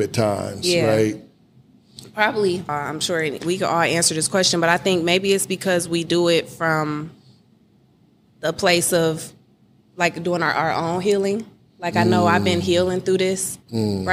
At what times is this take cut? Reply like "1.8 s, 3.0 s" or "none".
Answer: 2.7 s